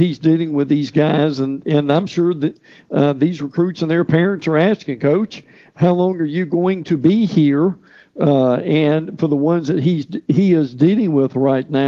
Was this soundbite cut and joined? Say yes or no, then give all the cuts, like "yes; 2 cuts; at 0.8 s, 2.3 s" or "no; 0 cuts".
no; 0 cuts